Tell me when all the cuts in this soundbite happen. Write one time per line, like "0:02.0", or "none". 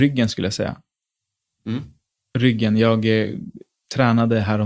none